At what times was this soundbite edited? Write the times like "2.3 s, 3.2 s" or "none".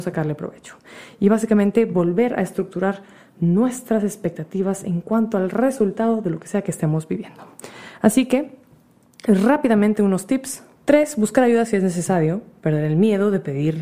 10.8 s